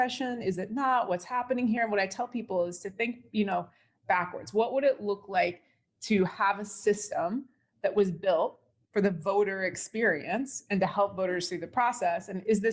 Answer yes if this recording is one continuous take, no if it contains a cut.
yes